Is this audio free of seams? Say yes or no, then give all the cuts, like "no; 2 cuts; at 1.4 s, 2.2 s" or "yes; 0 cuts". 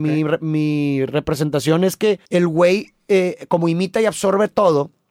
no; 1 cut; at 2.3 s